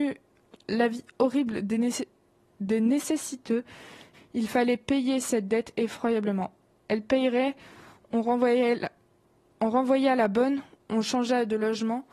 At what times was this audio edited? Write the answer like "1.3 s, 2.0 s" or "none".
4.1 s

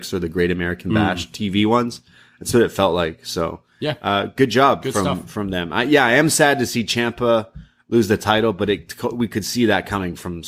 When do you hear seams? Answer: none

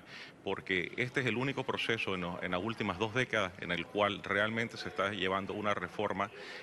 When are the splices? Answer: none

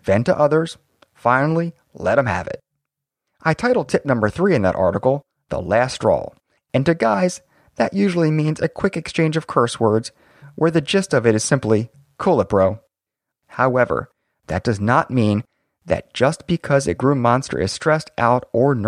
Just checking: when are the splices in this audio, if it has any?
13.3 s

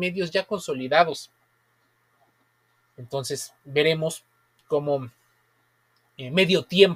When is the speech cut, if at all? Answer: none

